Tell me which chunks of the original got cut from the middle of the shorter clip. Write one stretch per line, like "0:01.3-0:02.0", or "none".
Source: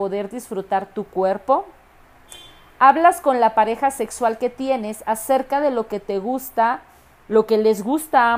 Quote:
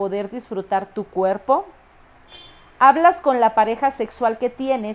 none